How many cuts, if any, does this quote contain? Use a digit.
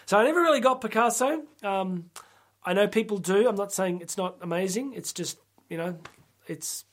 0